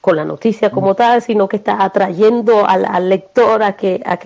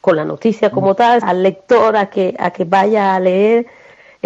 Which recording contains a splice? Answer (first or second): second